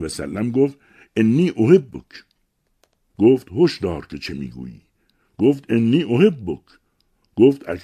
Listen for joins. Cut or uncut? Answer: cut